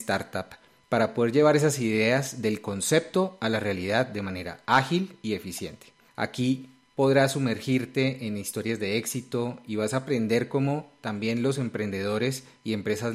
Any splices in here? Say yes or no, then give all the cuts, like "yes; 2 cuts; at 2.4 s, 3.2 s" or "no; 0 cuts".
yes; 1 cut; at 6.1 s